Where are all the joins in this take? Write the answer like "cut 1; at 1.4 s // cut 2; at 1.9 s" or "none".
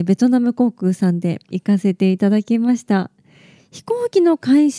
cut 1; at 1.5 s